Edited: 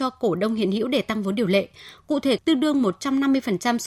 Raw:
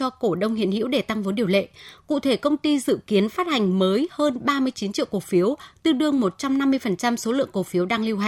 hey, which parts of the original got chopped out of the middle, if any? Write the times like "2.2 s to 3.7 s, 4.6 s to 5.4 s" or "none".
2.4 s to 5.8 s